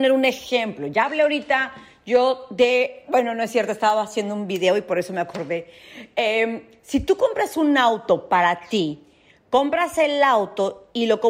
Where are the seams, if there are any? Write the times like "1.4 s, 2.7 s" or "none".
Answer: none